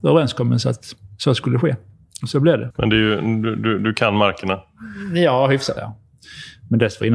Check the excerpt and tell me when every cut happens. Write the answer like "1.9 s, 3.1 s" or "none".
2.7 s, 5.8 s